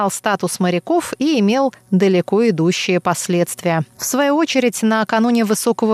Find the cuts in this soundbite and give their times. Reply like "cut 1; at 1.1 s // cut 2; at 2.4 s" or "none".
cut 1; at 3.9 s